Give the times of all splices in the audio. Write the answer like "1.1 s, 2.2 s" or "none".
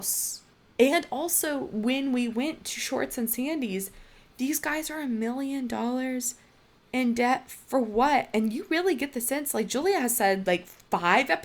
none